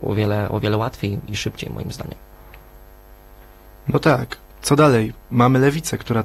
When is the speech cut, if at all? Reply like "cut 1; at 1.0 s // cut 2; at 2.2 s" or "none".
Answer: none